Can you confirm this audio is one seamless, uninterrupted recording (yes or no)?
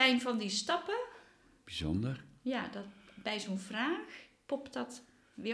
yes